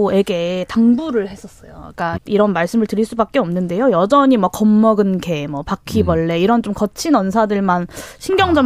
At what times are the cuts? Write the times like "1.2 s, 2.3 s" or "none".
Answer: 2.2 s